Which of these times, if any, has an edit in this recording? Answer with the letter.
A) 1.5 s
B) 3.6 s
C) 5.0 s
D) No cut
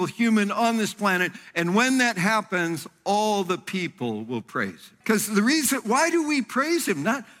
C